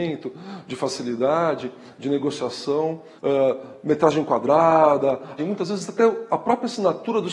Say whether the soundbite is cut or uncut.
cut